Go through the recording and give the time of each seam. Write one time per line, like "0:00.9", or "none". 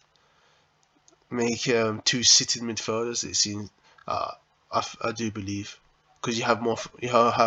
none